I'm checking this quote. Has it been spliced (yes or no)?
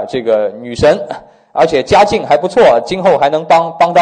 no